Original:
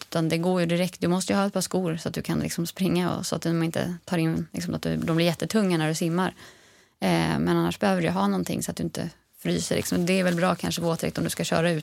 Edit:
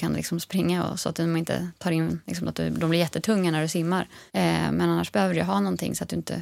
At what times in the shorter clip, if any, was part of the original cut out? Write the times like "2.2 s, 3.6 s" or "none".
4.3 s